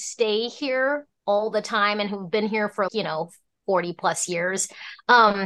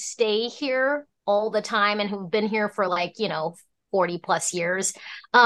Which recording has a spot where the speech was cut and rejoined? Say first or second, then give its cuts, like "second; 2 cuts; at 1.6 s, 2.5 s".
first; 1 cut; at 2.9 s